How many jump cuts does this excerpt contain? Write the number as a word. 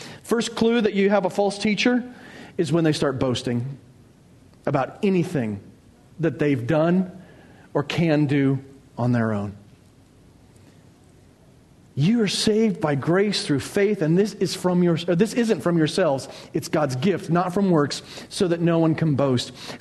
zero